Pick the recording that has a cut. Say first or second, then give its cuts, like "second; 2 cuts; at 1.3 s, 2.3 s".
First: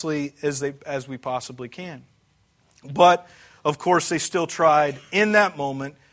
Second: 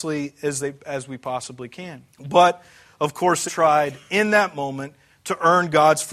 second; 2 cuts; at 2.1 s, 3.5 s